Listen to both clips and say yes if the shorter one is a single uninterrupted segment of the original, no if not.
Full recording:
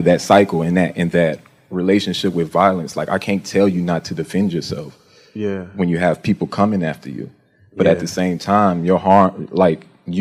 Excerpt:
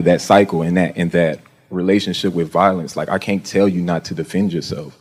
yes